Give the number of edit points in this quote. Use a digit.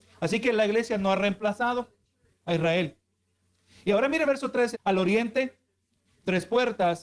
1